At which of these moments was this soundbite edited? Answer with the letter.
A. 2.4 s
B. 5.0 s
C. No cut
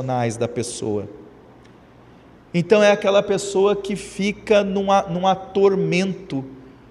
A